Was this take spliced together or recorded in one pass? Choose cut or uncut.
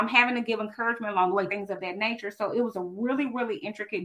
cut